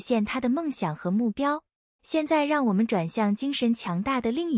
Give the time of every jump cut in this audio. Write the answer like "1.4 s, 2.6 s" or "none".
2.0 s